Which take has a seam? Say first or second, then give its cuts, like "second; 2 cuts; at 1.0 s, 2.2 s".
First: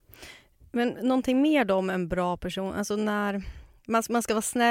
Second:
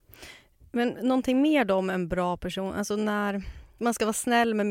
second; 1 cut; at 3.8 s